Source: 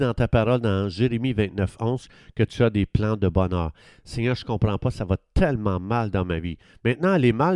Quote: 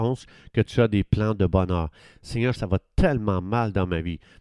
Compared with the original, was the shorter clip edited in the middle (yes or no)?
yes